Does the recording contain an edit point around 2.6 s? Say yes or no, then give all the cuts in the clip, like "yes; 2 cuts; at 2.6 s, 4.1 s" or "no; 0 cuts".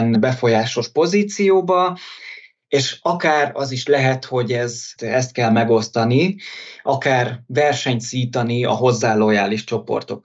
no; 1 cut; at 5.0 s